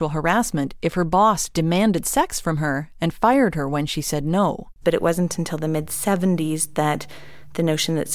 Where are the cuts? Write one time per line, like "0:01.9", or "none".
0:04.8